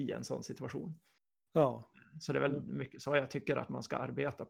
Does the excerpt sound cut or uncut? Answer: uncut